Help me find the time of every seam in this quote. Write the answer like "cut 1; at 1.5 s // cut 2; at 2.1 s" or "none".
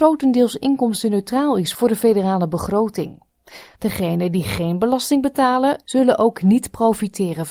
cut 1; at 3.7 s // cut 2; at 5.8 s

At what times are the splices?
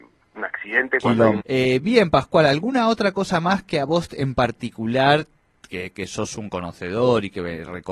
cut 1; at 1.4 s

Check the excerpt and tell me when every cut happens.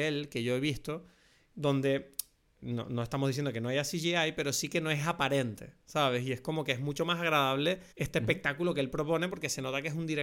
cut 1; at 2.6 s // cut 2; at 7.9 s

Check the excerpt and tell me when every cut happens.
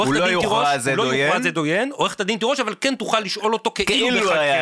none

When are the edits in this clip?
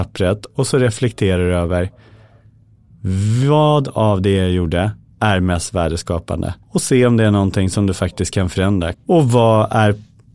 cut 1; at 6.6 s // cut 2; at 8.9 s

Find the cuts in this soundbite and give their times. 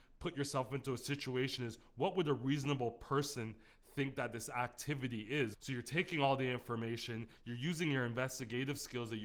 cut 1; at 5.5 s // cut 2; at 7.4 s

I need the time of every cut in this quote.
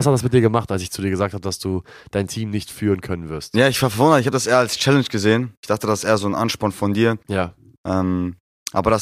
cut 1; at 7.2 s

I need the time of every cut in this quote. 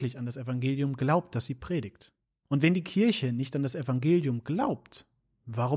none

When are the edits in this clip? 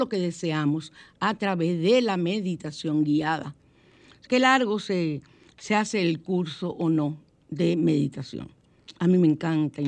cut 1; at 4.3 s

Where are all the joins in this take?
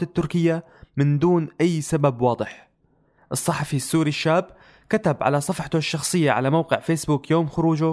cut 1; at 3.2 s

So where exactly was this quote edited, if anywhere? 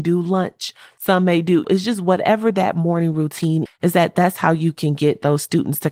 cut 1; at 1.6 s // cut 2; at 3.7 s

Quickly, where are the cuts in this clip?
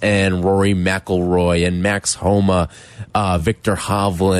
none

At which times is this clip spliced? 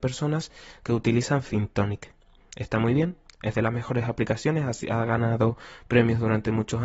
none

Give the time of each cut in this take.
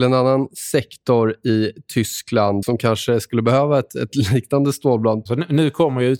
cut 1; at 2.6 s // cut 2; at 5.3 s

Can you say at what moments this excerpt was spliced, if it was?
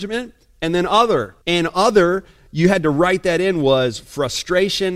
cut 1; at 1.4 s

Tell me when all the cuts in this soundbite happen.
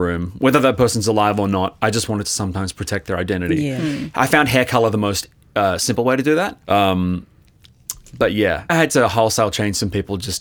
cut 1; at 6.6 s // cut 2; at 8.7 s

